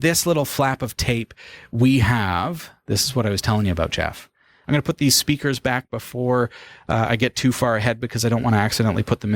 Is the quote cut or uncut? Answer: cut